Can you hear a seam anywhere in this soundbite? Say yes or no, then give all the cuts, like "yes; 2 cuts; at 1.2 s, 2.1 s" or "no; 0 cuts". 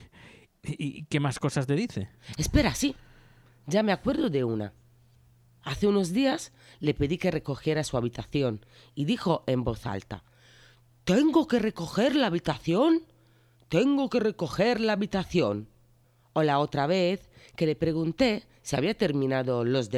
yes; 1 cut; at 2.2 s